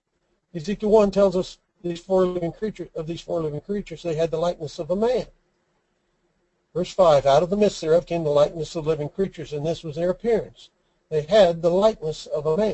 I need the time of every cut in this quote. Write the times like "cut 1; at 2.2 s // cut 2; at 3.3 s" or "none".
none